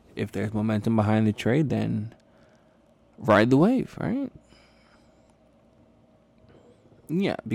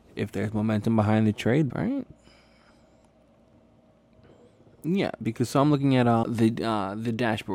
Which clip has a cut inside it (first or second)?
second